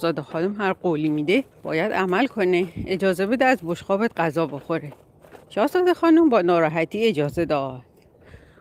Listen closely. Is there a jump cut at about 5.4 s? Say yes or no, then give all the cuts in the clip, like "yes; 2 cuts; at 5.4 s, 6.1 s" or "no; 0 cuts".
yes; 2 cuts; at 1.5 s, 5.4 s